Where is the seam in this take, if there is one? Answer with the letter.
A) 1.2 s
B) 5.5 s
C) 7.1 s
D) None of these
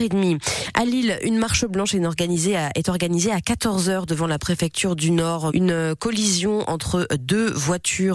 B